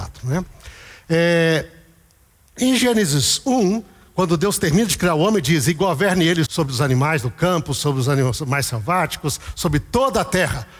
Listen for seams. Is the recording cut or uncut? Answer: cut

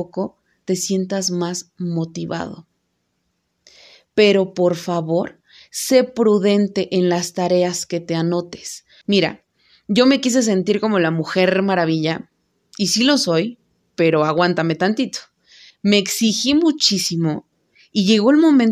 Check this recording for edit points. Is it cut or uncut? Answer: cut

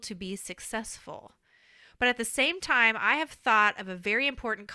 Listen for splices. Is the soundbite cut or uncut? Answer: uncut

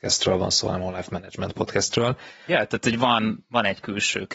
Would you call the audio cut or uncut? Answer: cut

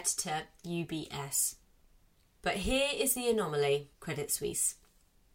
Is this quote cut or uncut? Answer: cut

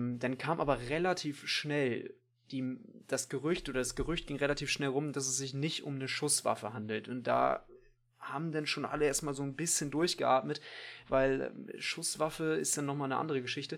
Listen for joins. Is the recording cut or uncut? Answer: uncut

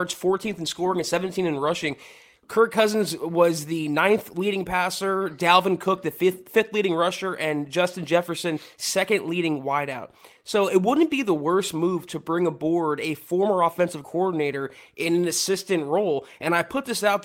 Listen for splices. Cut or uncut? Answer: uncut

